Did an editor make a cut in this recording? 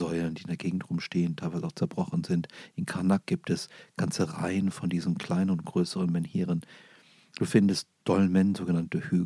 no; 0 cuts

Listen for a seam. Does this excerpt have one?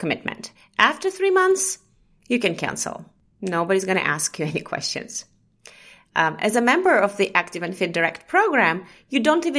no; 0 cuts

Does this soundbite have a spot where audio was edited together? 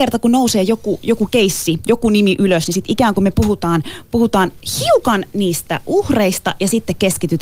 no; 0 cuts

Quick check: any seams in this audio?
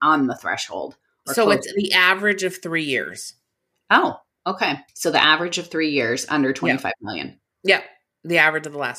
yes; 1 cut; at 4.9 s

